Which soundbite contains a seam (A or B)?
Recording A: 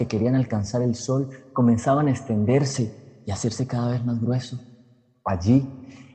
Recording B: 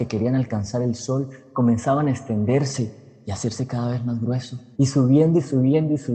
B